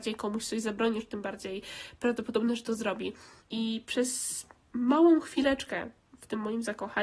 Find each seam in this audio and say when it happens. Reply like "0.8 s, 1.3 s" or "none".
3.4 s